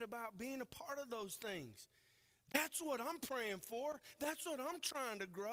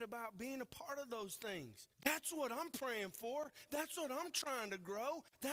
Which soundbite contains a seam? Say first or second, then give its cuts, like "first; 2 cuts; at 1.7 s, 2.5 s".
second; 1 cut; at 1.9 s